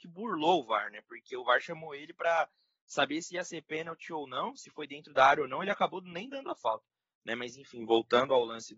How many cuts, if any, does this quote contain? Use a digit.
0